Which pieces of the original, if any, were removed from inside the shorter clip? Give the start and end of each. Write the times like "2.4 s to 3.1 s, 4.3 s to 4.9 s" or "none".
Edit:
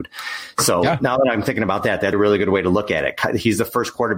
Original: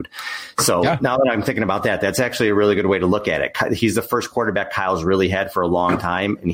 2.1 s to 2.5 s